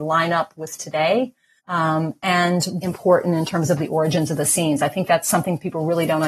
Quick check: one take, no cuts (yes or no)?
no